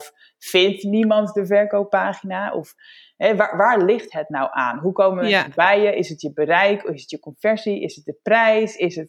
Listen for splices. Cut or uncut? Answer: uncut